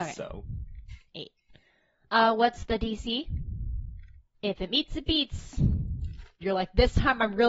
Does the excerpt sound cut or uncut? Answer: cut